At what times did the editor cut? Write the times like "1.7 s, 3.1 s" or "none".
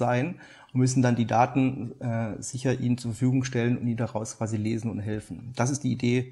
none